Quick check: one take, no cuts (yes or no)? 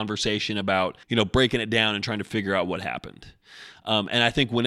no